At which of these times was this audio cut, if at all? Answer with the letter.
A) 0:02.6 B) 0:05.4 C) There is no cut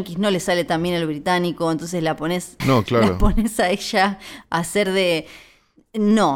A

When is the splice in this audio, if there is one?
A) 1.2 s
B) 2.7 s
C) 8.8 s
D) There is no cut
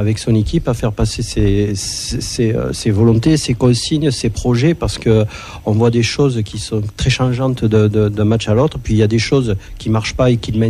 B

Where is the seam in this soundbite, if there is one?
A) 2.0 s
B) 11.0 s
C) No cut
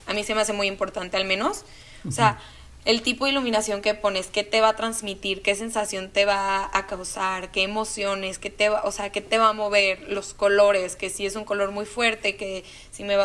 C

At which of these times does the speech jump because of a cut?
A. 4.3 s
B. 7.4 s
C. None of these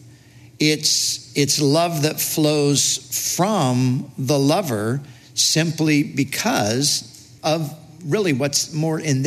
B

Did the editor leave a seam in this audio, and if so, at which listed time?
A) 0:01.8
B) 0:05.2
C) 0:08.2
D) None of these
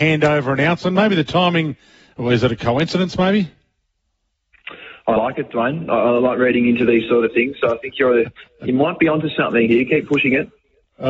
D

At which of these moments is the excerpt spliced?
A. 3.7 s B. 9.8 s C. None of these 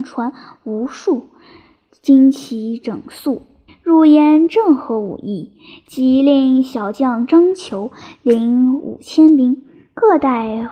A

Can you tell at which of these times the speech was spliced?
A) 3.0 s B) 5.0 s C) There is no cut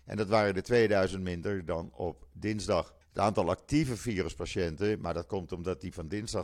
A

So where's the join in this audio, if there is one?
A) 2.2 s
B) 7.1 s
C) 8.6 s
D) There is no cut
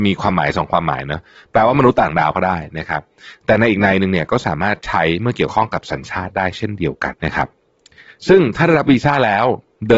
B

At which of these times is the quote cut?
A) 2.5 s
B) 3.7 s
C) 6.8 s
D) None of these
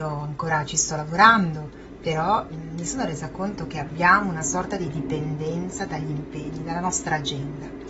A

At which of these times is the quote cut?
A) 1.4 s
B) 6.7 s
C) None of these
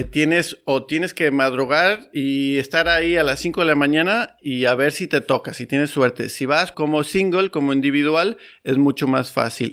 B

